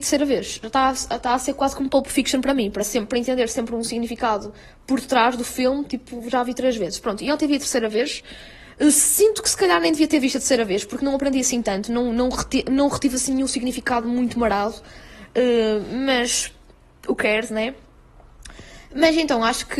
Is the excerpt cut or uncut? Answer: uncut